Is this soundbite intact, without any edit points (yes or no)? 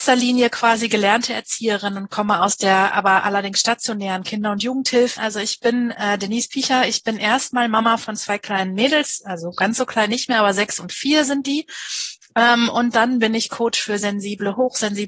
no